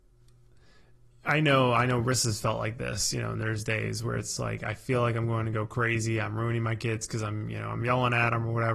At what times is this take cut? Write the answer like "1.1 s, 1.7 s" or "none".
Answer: 4.4 s